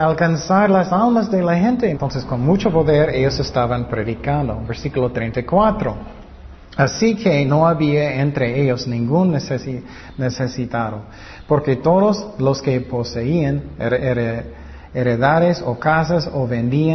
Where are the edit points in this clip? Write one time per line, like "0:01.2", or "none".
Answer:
0:01.9